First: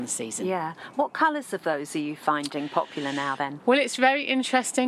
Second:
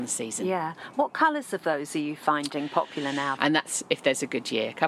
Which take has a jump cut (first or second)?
second